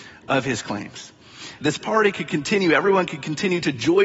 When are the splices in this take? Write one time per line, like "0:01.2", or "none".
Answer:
0:01.6